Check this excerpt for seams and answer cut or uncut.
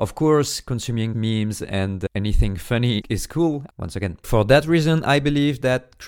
cut